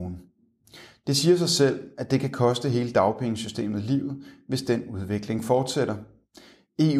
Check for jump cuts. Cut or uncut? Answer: uncut